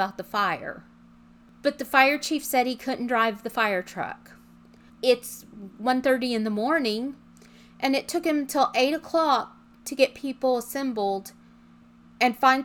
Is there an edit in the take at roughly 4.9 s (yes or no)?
yes